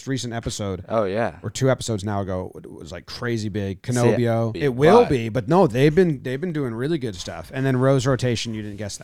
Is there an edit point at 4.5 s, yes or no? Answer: yes